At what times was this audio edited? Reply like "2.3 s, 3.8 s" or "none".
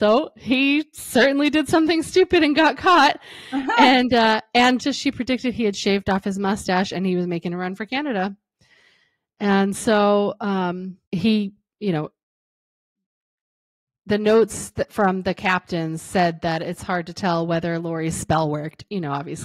4.8 s, 11.0 s